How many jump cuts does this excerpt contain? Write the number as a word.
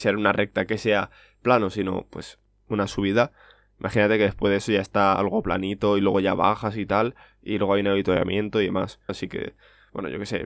one